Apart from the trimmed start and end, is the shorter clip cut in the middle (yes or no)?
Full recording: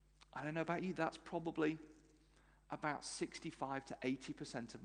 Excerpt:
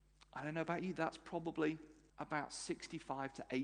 yes